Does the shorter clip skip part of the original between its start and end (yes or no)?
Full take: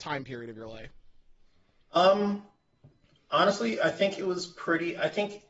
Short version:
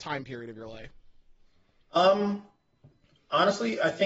no